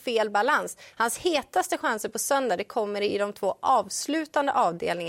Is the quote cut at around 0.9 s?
yes; 1 cut; at 0.9 s

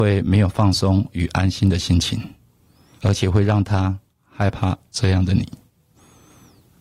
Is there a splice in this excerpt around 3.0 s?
yes; 1 cut; at 3.0 s

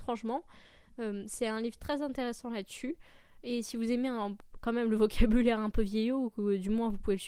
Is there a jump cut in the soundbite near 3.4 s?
no; 0 cuts

